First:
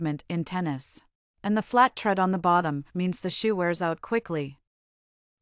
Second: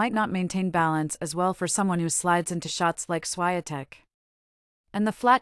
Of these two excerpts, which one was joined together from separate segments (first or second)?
first